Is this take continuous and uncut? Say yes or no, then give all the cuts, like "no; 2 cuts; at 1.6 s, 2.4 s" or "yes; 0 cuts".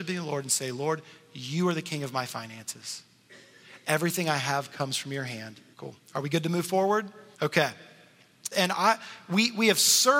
no; 3 cuts; at 5.7 s, 7.3 s, 8.5 s